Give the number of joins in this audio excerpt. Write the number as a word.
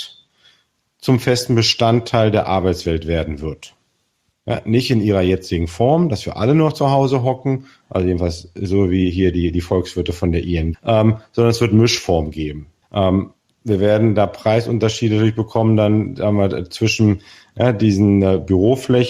two